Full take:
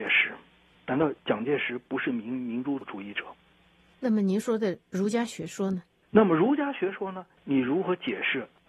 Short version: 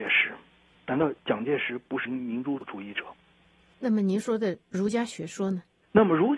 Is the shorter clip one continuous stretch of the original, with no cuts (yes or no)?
no